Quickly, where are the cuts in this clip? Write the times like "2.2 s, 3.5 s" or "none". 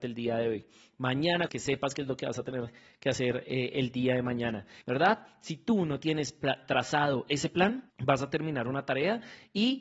1.5 s, 4.8 s, 7.9 s